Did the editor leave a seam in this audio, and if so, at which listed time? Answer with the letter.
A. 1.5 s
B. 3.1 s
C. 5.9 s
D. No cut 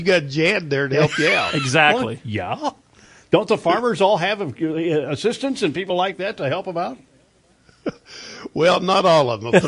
D